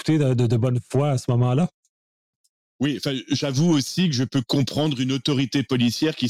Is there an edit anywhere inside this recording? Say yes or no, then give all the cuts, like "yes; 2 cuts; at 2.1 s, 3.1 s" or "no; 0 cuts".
no; 0 cuts